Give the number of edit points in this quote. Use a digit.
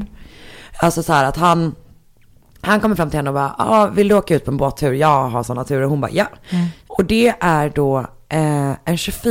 1